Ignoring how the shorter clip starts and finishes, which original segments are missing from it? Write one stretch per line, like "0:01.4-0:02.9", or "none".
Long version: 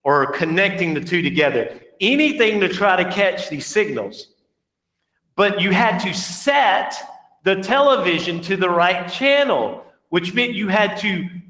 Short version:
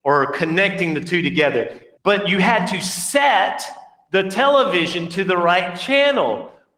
0:02.0-0:05.3